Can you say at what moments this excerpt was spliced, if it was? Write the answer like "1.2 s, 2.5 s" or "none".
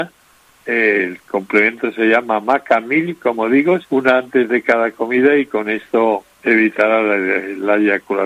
3.8 s